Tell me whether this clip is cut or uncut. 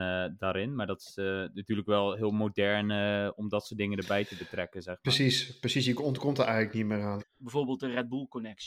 cut